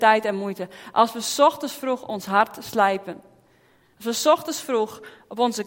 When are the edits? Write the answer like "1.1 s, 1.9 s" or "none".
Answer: none